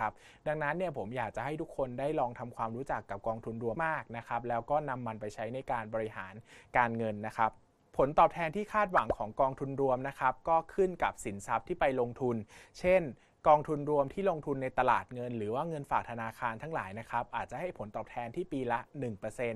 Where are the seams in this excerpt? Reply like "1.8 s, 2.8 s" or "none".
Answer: 3.7 s